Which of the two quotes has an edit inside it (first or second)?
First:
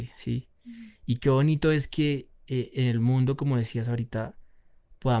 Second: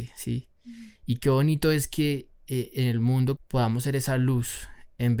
second